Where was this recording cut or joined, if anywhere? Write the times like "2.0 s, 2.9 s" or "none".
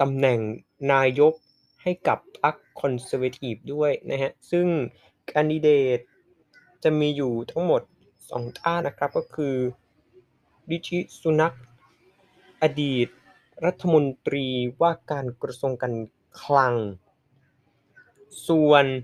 8.8 s